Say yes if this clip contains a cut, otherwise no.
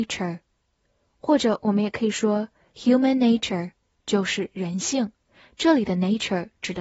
no